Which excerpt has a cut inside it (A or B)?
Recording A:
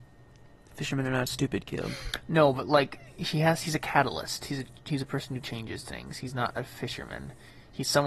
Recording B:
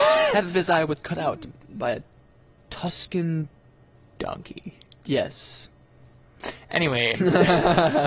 B